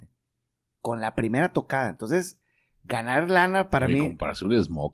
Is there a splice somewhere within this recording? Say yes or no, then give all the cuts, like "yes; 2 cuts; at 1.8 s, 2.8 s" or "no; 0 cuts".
no; 0 cuts